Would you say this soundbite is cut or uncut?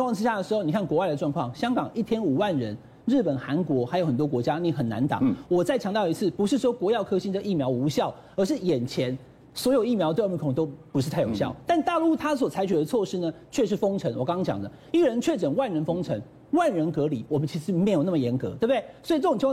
uncut